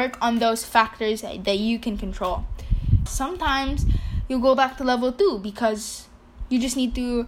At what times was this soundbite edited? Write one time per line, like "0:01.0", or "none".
0:03.1